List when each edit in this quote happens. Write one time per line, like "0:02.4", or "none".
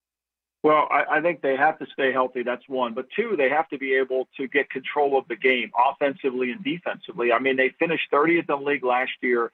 none